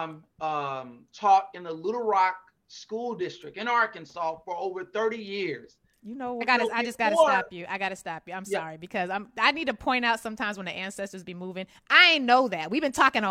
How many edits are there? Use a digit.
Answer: 1